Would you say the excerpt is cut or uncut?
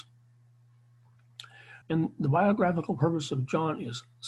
cut